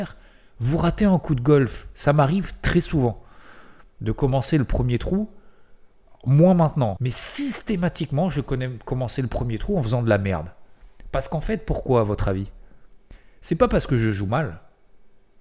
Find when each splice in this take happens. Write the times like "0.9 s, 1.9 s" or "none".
7.0 s